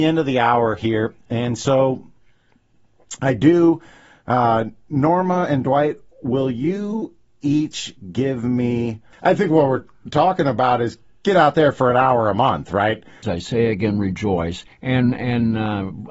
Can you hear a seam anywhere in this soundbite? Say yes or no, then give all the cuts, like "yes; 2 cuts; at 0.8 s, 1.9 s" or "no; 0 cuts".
yes; 3 cuts; at 9.1 s, 13.2 s, 14.7 s